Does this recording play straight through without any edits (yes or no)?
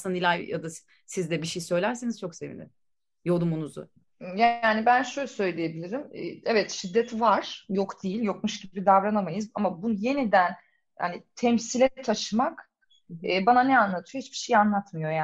yes